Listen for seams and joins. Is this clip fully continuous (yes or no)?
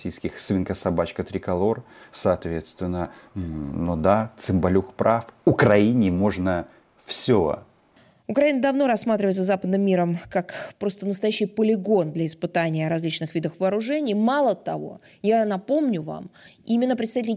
yes